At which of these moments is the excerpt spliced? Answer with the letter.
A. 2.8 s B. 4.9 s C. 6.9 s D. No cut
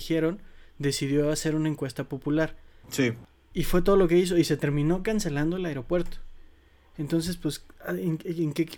A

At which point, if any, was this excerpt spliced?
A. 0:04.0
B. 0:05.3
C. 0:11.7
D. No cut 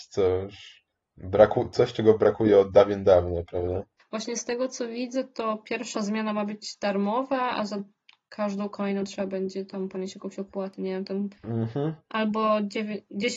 A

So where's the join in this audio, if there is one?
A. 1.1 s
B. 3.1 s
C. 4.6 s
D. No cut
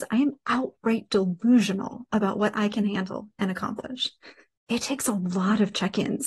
C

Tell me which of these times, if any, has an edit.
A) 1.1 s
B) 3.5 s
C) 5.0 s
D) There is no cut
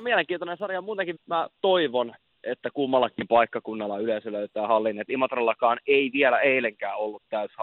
A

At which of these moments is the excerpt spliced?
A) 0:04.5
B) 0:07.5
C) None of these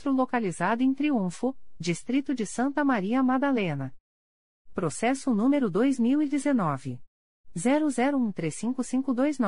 A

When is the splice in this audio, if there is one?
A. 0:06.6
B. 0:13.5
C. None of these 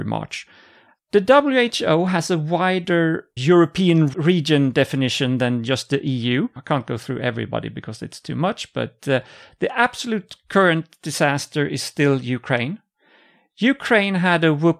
A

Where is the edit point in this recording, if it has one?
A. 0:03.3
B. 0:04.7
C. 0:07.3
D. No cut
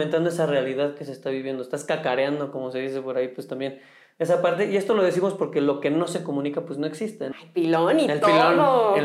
C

